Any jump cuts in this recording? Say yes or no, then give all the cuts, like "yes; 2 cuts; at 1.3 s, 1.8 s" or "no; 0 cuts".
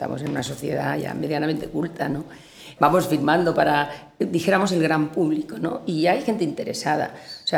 yes; 1 cut; at 2.8 s